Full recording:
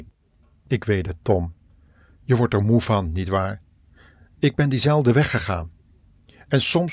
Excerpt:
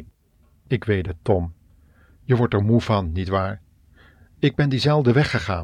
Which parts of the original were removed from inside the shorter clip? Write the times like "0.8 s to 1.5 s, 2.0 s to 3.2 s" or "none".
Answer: none